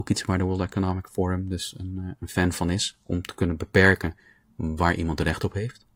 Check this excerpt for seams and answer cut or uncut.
uncut